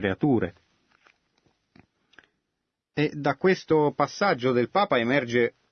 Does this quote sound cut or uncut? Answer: uncut